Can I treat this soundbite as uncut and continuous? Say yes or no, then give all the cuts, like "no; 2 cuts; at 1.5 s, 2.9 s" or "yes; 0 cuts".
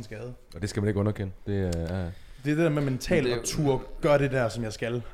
yes; 0 cuts